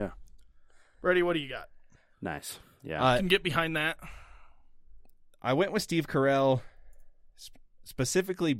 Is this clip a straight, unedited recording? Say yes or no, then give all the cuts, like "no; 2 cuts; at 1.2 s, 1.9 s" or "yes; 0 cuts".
no; 1 cut; at 2.1 s